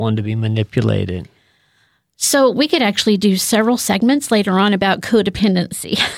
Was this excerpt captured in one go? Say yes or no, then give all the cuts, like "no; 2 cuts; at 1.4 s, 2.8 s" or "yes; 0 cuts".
yes; 0 cuts